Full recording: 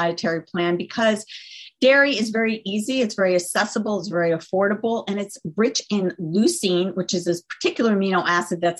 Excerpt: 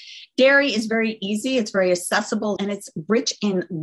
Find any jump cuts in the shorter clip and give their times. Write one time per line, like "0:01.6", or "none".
0:02.6

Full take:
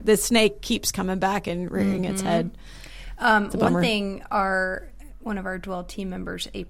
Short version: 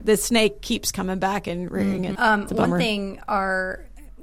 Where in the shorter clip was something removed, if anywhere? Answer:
0:02.2

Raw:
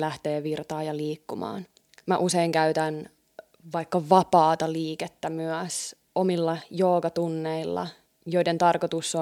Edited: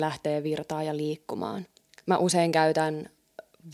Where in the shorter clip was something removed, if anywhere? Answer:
none

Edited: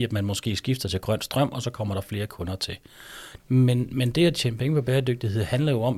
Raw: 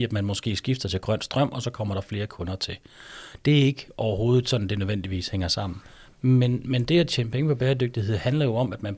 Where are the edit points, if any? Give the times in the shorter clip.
0:03.4

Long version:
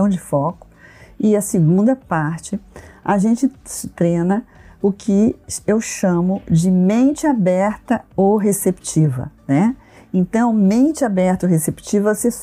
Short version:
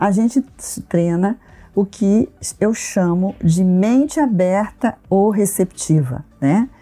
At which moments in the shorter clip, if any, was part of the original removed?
none

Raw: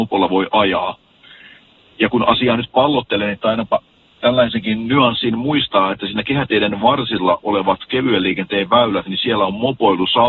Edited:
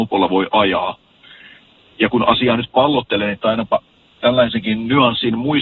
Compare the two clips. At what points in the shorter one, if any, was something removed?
none

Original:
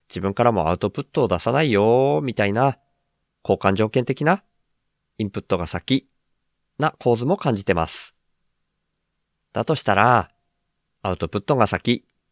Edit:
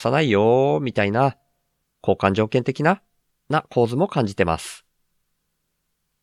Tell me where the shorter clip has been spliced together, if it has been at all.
0:03.3

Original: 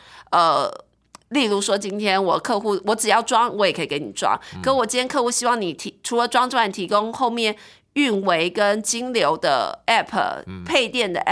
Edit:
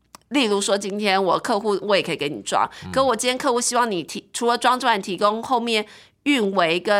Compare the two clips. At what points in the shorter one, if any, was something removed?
0:01.8

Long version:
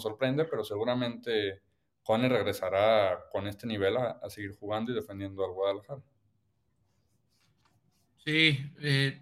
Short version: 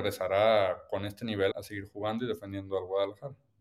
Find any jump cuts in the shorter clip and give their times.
0:01.5

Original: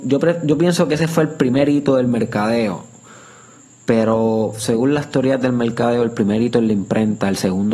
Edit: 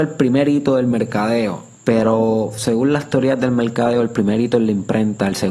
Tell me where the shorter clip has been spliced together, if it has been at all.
0:01.7

